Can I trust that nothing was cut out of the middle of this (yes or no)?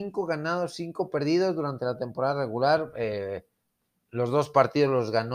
yes